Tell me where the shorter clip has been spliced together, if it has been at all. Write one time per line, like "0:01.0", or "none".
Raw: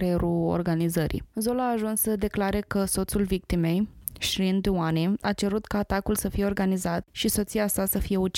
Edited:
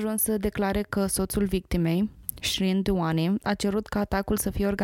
none